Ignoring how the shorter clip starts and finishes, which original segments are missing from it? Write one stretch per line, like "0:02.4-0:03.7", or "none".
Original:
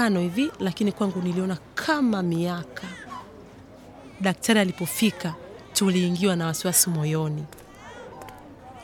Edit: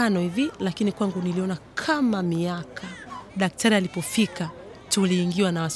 0:03.3-0:04.1